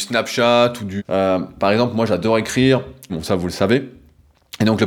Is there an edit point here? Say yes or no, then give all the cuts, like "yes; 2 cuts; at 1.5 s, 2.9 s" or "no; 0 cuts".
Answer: yes; 2 cuts; at 1.0 s, 3.1 s